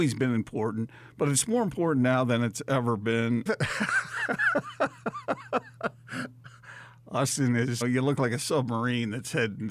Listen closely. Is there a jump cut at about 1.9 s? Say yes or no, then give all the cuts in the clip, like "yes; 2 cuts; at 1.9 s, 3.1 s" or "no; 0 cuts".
no; 2 cuts; at 3.5 s, 7.8 s